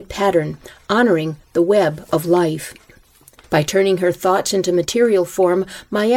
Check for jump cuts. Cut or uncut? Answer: cut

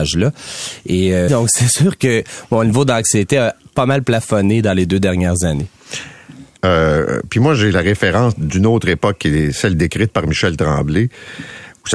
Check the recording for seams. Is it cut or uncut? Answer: cut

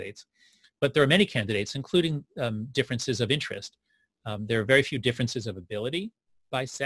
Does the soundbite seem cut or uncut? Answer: uncut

